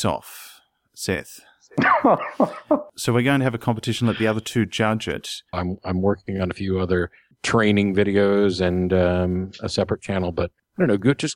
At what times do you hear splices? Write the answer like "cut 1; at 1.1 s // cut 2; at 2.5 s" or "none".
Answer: cut 1; at 5.5 s

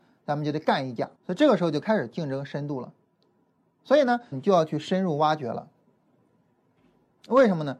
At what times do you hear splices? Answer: cut 1; at 1.1 s // cut 2; at 4.3 s

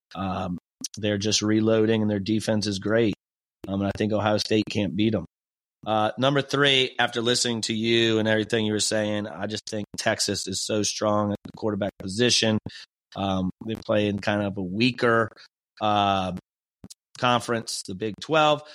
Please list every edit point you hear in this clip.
none

